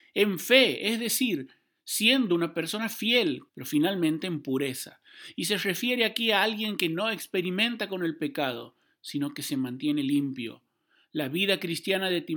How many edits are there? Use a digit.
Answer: 1